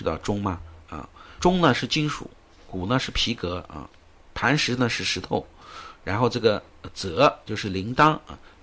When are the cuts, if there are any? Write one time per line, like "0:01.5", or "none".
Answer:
0:01.4